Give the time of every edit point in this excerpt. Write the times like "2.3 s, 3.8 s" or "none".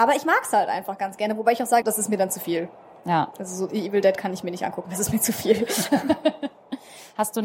1.8 s